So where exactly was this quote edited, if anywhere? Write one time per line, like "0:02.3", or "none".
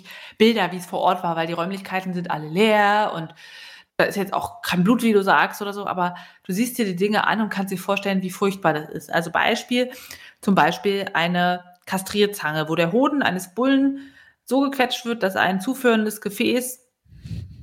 none